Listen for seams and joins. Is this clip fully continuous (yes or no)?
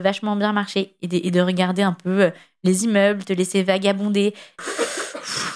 no